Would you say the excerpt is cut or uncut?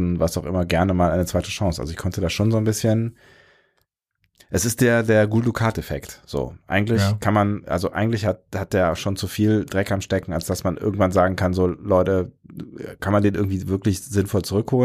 uncut